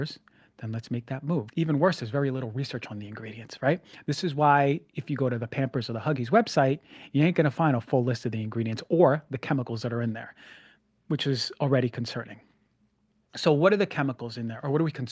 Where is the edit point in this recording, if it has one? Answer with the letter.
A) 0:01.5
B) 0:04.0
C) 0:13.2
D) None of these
A